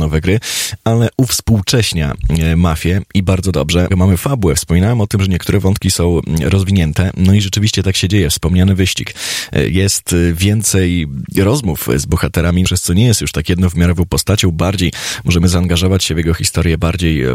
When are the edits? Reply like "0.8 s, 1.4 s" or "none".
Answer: 3.9 s, 12.6 s